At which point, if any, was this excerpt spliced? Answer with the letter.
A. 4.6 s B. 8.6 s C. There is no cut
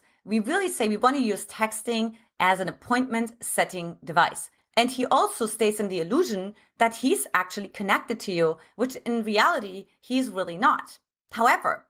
A